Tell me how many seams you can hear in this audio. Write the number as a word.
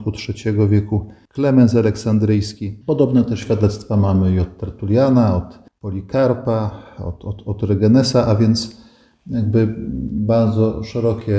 one